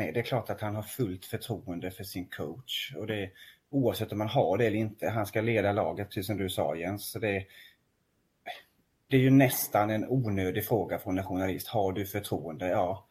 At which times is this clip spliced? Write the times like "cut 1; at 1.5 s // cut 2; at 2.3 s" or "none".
none